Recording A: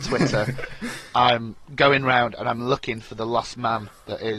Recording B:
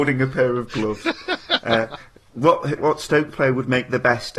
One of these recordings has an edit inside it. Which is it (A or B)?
B